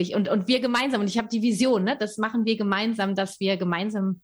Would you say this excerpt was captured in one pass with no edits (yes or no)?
yes